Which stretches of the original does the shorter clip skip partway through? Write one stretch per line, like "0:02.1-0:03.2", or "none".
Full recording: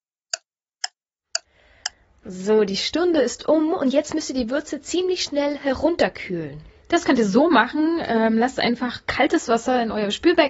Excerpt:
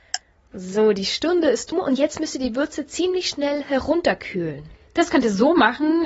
0:03.4-0:03.7